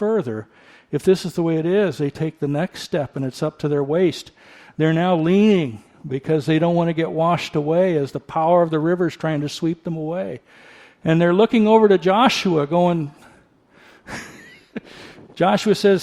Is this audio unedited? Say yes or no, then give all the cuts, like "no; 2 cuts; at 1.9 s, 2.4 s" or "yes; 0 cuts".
yes; 0 cuts